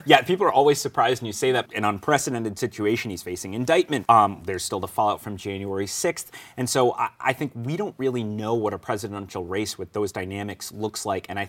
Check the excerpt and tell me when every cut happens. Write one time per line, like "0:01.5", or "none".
0:01.7
0:04.0